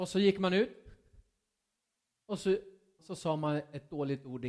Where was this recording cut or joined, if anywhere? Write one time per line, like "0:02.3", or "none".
0:03.0